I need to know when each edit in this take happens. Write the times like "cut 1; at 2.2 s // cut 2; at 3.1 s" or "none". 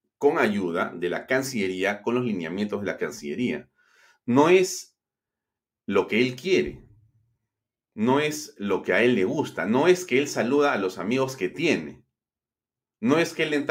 none